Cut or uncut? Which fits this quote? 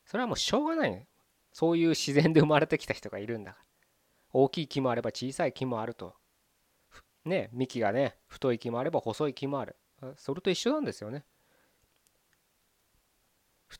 uncut